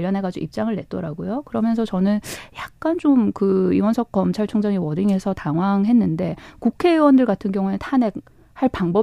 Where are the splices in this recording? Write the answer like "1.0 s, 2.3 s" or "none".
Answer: none